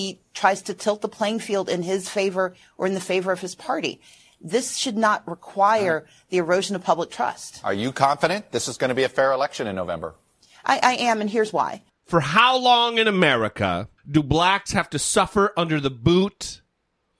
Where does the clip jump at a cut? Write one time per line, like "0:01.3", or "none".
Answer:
0:11.9
0:14.0